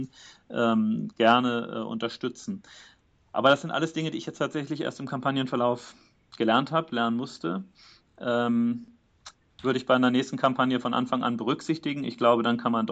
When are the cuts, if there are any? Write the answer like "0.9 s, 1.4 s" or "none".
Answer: none